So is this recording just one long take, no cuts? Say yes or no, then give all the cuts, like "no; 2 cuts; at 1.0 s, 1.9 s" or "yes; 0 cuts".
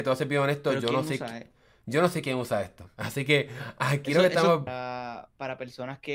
no; 1 cut; at 4.7 s